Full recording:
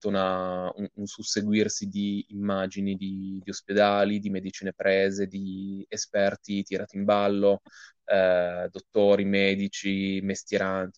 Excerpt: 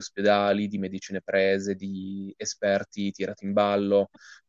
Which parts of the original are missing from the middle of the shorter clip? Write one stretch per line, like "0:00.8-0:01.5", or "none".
none